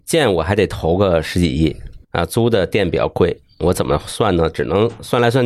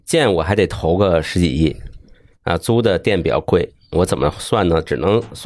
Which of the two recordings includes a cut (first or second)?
first